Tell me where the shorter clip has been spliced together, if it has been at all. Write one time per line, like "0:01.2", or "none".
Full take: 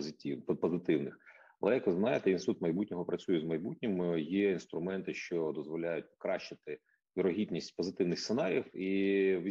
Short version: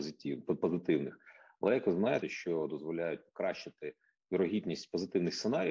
0:02.2

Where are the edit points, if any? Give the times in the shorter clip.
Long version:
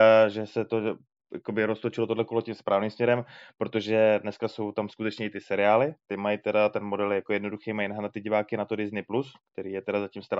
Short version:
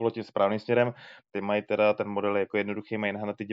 0:01.2

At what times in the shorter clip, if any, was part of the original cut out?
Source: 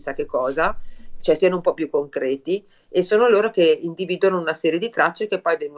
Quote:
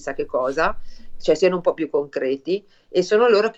none

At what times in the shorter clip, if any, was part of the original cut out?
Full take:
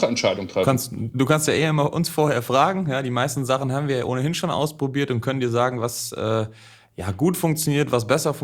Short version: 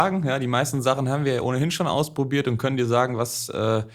none

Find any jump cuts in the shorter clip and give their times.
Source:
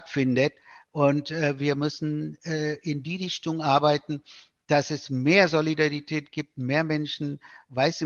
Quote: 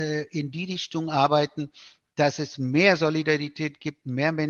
none

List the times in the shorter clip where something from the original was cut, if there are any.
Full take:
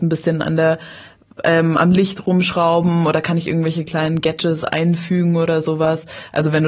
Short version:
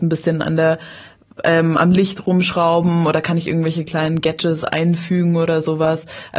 none

